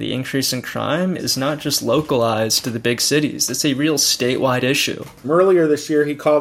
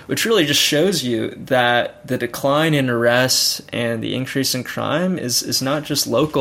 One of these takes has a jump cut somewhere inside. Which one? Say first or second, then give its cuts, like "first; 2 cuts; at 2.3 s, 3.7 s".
first; 2 cuts; at 1.2 s, 5.2 s